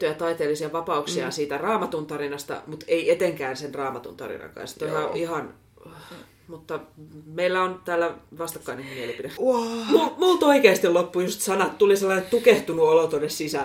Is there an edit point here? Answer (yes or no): yes